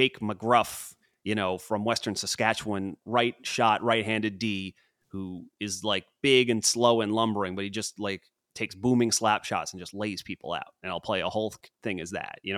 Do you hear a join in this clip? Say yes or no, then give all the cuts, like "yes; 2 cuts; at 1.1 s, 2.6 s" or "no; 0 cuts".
no; 0 cuts